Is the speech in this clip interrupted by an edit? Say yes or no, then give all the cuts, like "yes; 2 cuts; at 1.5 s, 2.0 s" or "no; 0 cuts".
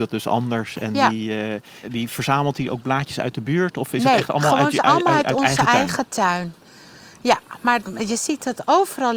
yes; 1 cut; at 1.8 s